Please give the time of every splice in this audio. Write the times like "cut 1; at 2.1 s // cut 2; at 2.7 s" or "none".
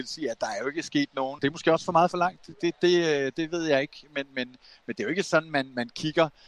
cut 1; at 1.4 s